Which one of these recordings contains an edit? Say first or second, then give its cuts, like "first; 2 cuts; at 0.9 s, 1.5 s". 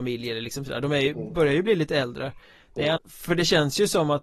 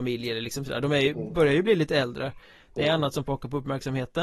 first; 1 cut; at 3.0 s